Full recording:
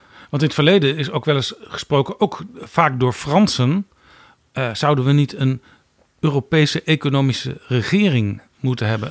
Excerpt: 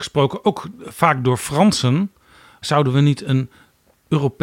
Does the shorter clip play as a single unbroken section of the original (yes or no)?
no